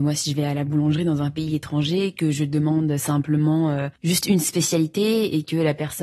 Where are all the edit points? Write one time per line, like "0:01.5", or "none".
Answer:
0:04.0